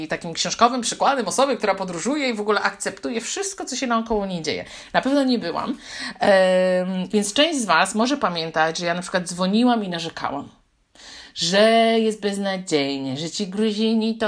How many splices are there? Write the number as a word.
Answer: one